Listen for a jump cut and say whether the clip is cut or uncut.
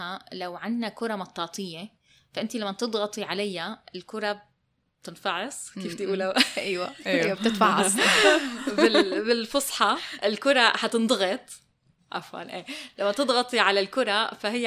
uncut